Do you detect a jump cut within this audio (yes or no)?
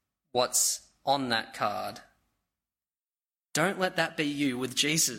no